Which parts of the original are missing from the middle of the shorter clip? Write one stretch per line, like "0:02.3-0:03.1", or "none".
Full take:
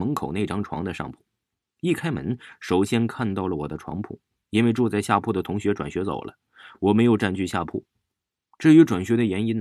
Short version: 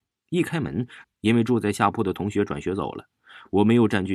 0:02.5-0:04.3